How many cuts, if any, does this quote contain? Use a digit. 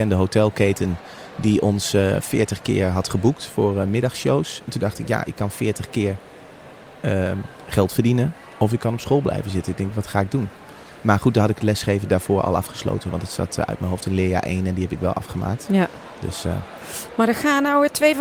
0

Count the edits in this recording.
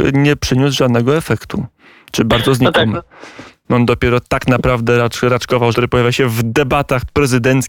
2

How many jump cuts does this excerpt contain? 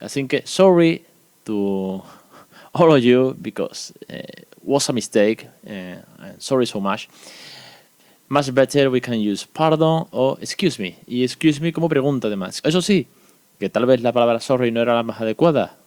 1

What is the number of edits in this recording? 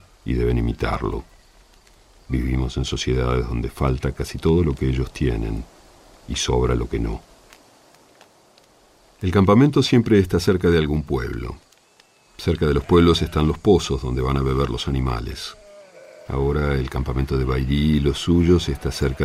1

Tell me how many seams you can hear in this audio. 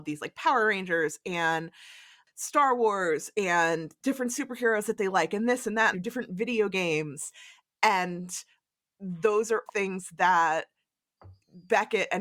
2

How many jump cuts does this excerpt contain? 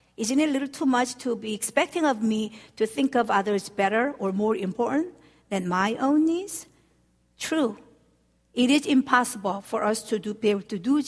0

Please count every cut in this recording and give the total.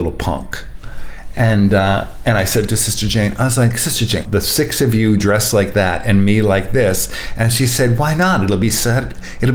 1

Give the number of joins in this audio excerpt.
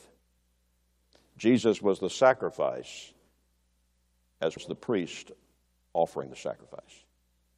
1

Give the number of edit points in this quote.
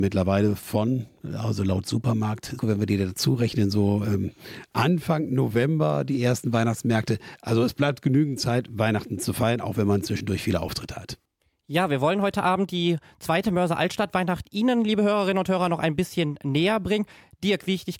1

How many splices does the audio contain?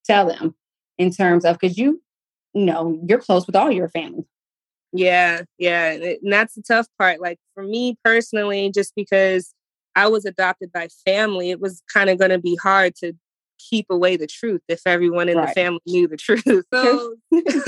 1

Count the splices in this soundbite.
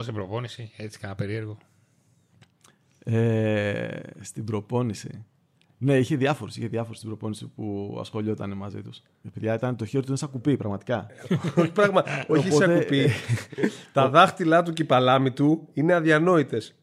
1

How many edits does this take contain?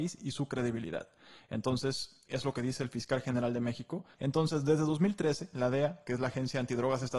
2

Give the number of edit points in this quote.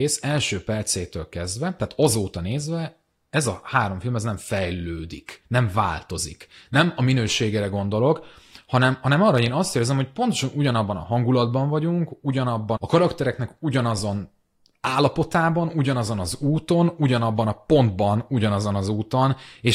1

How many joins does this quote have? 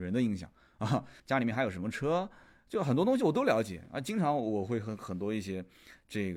1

